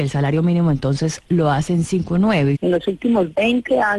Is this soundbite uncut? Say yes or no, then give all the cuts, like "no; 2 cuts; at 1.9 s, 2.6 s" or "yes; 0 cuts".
no; 1 cut; at 2.5 s